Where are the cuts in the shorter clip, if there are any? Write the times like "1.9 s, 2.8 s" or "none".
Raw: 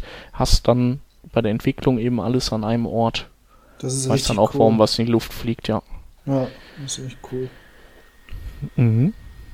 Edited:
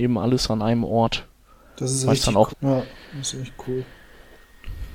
2.5 s